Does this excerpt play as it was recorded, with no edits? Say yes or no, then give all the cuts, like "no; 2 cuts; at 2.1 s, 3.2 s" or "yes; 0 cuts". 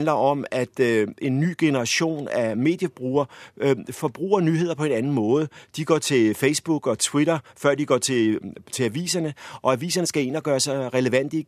yes; 0 cuts